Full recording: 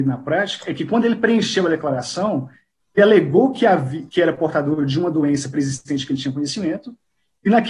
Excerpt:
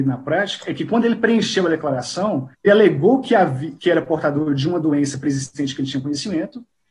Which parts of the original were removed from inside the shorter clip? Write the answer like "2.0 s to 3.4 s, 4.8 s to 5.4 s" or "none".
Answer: 2.5 s to 2.8 s